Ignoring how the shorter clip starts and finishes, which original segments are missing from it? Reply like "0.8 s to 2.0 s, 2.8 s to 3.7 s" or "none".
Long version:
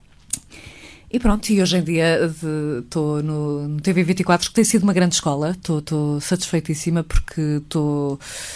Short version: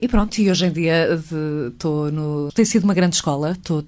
3.6 s to 4.5 s